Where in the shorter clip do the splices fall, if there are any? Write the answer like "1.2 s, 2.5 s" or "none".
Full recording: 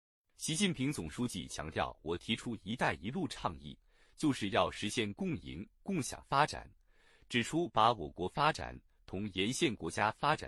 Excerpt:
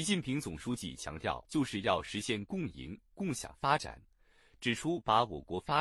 1.4 s